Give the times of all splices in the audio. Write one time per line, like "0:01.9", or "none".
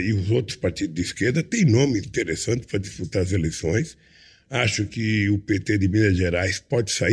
0:02.0